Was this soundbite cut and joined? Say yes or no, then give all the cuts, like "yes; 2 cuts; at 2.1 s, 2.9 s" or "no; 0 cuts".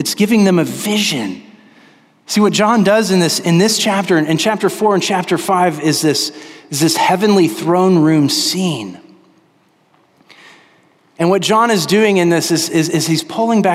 no; 0 cuts